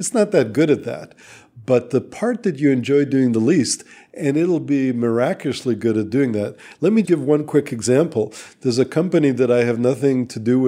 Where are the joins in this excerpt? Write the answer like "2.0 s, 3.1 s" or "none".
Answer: 7.0 s